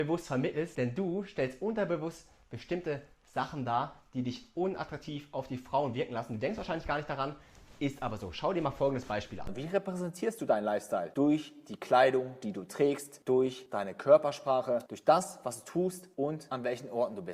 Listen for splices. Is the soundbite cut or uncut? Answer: cut